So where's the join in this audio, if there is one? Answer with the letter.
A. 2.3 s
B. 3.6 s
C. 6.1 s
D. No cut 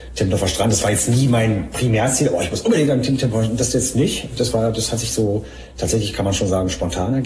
D